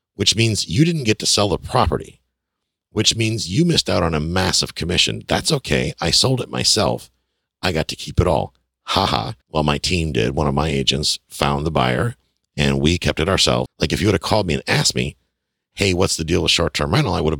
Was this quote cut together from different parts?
yes; 2 cuts; at 9.4 s, 13.7 s

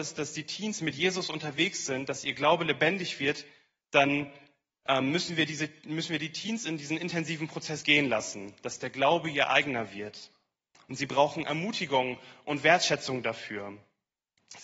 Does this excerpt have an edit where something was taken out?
no; 0 cuts

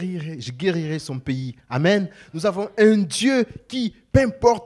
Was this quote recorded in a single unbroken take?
yes; 0 cuts

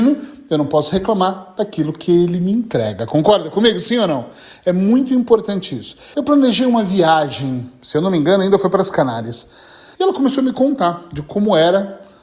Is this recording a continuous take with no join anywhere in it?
no; 2 cuts; at 6.1 s, 9.9 s

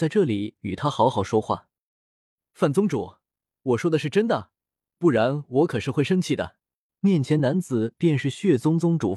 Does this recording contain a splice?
yes; 2 cuts; at 4.9 s, 6.9 s

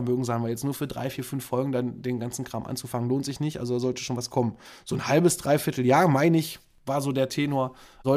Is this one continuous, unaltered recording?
yes; 0 cuts

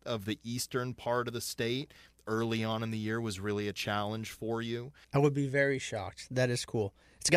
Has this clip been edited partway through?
yes; 1 cut; at 5.0 s

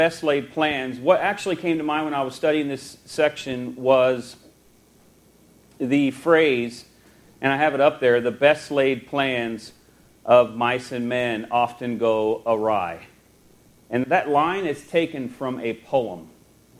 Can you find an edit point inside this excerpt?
yes; 1 cut; at 14.0 s

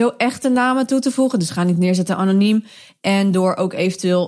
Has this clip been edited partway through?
no; 0 cuts

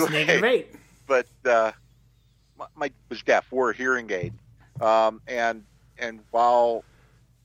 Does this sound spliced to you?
yes; 1 cut; at 2.9 s

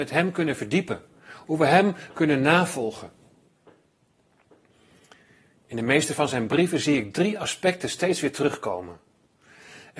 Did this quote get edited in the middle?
no; 0 cuts

